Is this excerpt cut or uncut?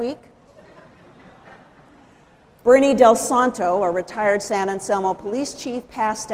uncut